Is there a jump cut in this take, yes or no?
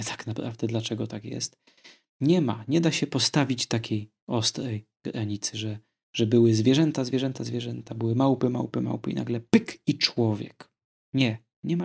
no